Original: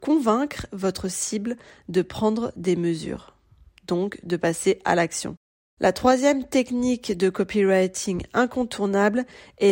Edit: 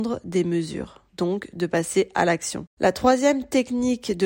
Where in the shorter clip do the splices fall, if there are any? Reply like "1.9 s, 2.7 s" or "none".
1.1 s, 2.7 s